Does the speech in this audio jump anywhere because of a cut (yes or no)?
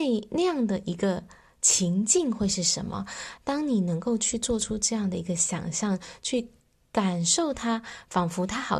no